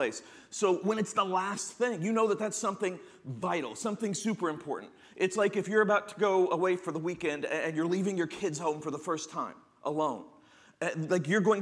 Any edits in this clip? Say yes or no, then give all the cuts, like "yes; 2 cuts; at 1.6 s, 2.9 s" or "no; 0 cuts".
no; 0 cuts